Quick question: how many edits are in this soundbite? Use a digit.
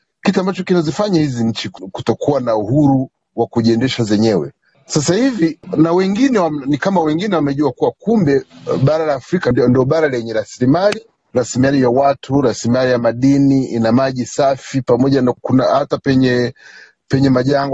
0